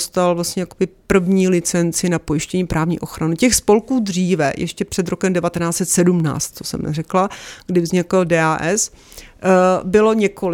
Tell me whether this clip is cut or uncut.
uncut